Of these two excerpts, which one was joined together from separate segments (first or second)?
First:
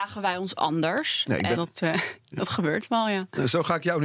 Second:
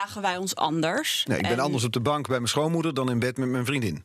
first